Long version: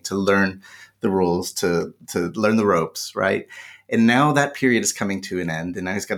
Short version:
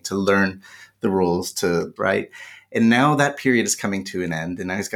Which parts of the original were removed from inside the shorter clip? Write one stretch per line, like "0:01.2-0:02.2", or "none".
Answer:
0:02.0-0:03.1